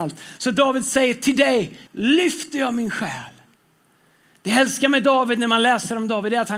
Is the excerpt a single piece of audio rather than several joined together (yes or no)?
no